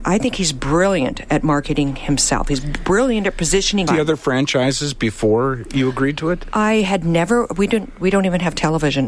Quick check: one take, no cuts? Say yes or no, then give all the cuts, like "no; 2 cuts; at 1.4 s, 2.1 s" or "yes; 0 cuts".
no; 1 cut; at 3.9 s